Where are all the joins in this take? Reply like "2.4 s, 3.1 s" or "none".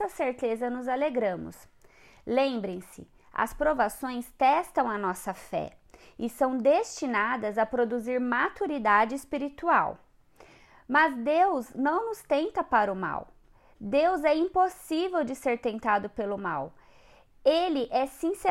none